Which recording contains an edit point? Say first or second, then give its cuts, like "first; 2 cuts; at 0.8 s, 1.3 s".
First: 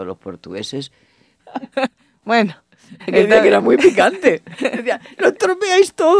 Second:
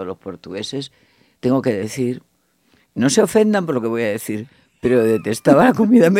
first; 1 cut; at 1.4 s